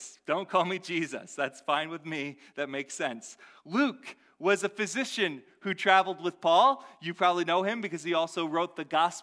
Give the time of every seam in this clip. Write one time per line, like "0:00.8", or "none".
none